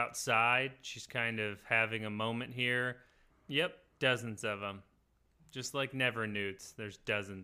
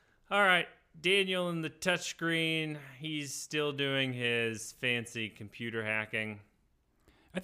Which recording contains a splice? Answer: first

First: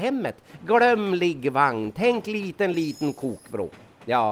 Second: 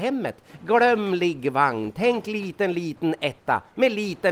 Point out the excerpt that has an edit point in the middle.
first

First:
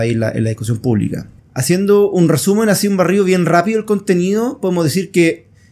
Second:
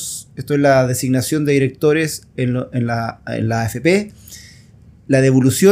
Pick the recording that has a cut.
first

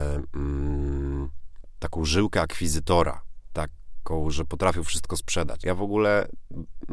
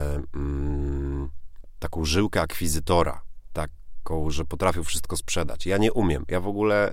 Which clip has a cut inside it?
first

